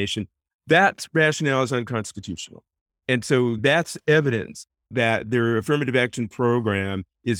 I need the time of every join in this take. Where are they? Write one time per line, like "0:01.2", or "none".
none